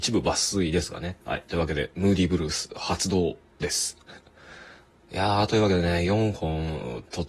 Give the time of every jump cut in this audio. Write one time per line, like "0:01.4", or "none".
0:01.2